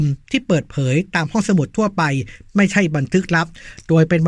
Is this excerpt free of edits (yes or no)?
yes